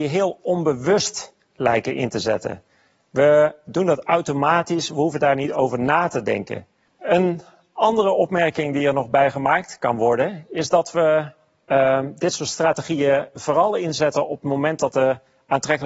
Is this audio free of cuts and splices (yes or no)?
yes